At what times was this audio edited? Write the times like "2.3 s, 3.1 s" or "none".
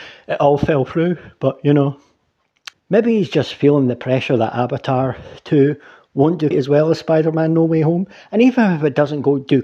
2.7 s, 6.5 s

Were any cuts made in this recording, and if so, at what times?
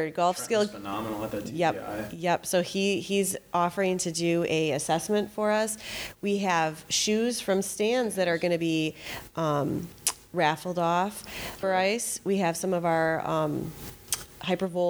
11.6 s

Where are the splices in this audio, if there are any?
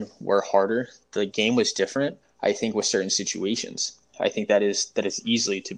2.2 s

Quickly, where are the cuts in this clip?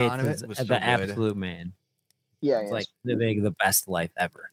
none

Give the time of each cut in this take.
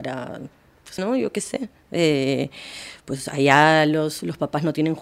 1.0 s

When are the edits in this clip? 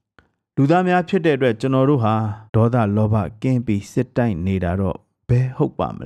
2.5 s

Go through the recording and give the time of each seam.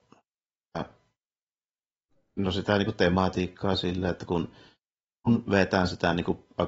none

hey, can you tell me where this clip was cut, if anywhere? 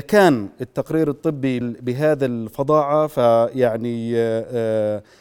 1.6 s

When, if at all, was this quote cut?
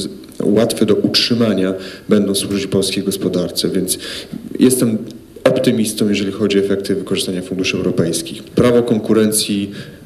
8.5 s

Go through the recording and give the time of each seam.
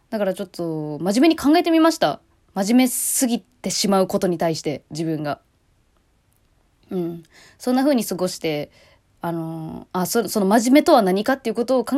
none

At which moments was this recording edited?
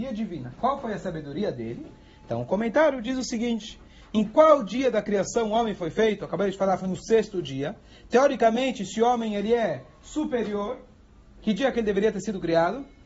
none

